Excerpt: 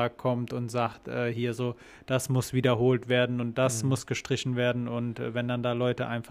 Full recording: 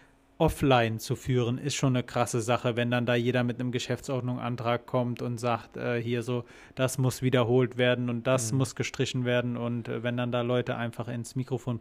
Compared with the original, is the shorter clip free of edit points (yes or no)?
yes